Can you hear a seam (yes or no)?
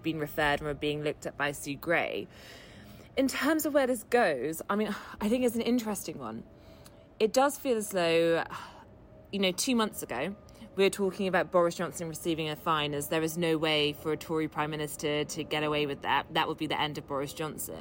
no